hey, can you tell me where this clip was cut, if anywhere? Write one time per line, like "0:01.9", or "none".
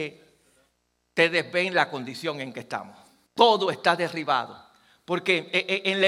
0:03.3